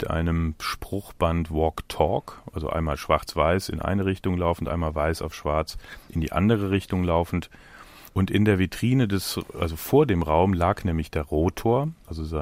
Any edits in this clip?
yes; 1 cut; at 8.1 s

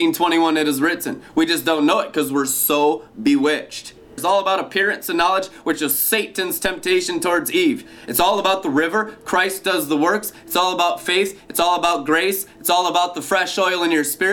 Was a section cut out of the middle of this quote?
yes; 1 cut; at 4.2 s

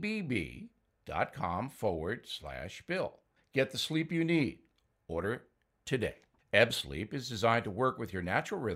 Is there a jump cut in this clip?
yes; 2 cuts; at 3.4 s, 6.4 s

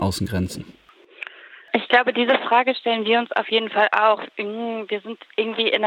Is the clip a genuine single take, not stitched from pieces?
yes; 0 cuts

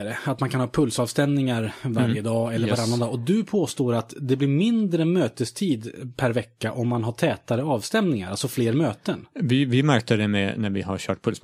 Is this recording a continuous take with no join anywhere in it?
yes; 0 cuts

